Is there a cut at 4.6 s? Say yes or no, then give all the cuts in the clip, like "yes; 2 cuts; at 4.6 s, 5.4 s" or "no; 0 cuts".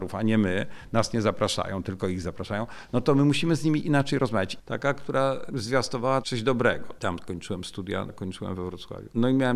yes; 3 cuts; at 4.6 s, 7.0 s, 8.1 s